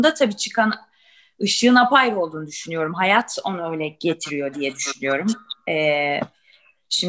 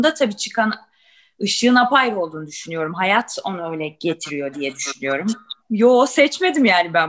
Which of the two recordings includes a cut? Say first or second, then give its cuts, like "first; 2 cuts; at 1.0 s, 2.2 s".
second; 1 cut; at 5.6 s